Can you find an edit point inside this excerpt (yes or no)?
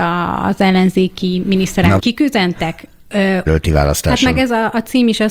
yes